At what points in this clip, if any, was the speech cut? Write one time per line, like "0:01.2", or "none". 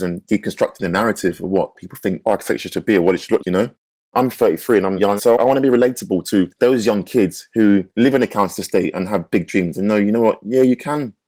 0:03.4
0:05.2